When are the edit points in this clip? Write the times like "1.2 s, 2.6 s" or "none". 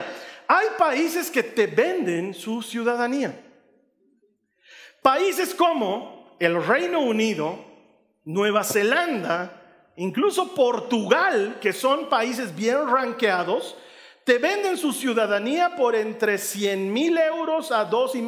none